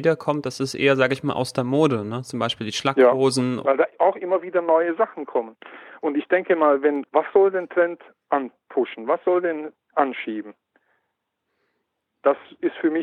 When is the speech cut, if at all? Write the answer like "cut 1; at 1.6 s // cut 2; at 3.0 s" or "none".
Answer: cut 1; at 3.6 s // cut 2; at 7.1 s